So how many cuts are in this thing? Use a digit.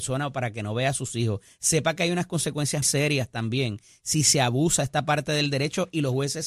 1